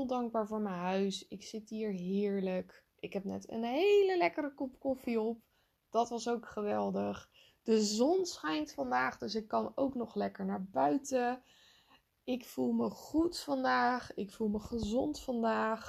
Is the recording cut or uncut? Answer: uncut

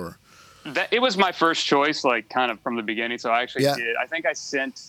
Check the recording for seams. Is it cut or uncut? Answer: uncut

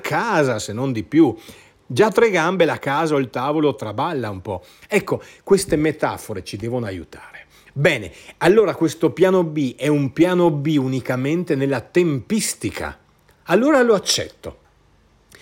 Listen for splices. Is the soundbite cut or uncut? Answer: uncut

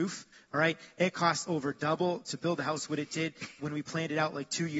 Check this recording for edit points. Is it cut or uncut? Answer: cut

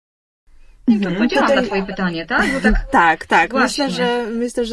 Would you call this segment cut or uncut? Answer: uncut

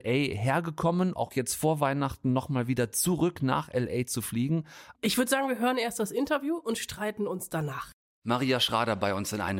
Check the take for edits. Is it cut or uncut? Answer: cut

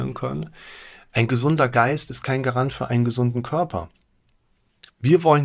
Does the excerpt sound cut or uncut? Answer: cut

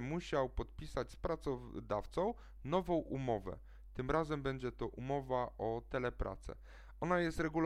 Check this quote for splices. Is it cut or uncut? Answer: uncut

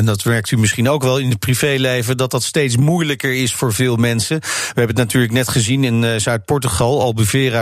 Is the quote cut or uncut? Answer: uncut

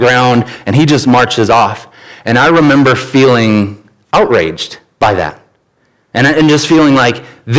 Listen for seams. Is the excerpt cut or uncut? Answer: uncut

